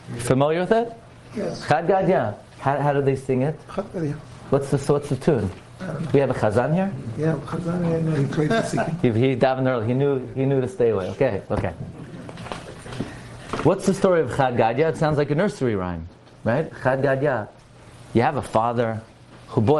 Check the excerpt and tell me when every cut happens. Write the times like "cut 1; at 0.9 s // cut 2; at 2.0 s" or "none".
none